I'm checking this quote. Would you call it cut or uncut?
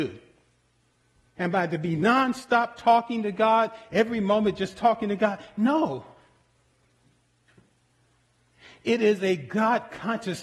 cut